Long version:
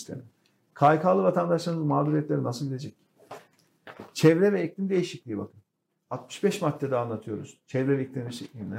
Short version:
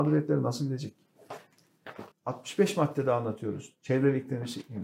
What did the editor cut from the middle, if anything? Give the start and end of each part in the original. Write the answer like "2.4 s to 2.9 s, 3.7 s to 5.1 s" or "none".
4.1 s to 6.0 s

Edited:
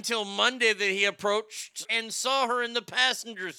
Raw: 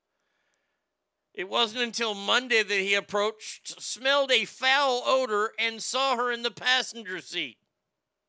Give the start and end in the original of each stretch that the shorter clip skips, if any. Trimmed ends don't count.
3.7 s to 5.5 s

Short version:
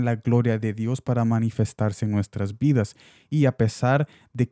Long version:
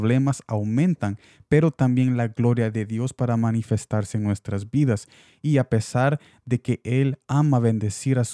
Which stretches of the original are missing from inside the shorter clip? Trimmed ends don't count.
none

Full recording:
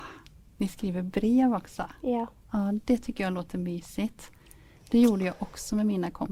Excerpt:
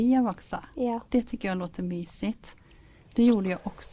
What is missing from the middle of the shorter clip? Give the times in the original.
2.3 s to 2.8 s

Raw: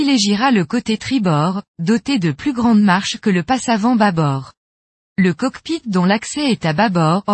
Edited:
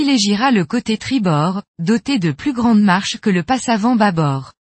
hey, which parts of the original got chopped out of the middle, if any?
none

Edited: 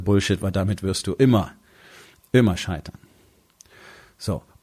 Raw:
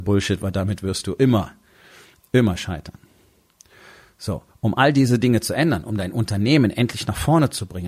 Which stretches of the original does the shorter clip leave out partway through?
none

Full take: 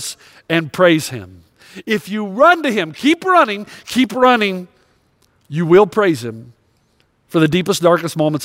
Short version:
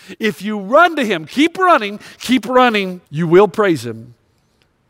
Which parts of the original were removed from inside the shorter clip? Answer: 4.7 s to 5.4 s

